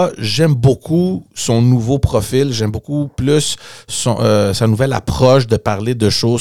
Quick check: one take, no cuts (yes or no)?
yes